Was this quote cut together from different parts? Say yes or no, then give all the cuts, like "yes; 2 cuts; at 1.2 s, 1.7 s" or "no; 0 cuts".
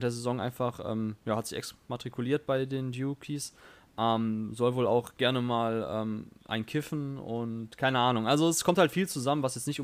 no; 0 cuts